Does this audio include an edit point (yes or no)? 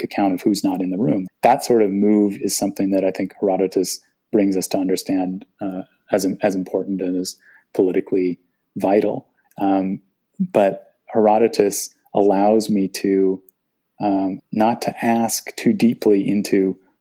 yes